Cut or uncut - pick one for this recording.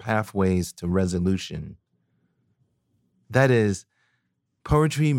cut